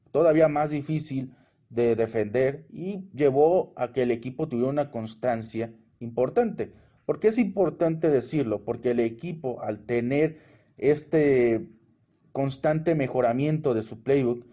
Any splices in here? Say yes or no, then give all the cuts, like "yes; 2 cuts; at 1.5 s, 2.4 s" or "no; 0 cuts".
no; 0 cuts